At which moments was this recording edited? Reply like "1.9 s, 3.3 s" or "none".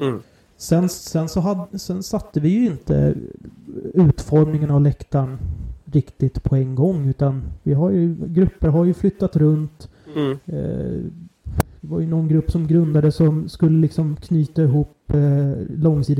none